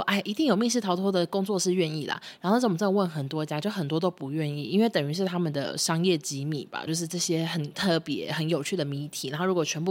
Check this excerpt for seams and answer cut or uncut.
cut